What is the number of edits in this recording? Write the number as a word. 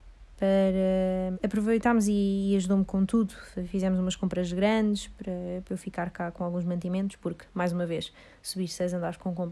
one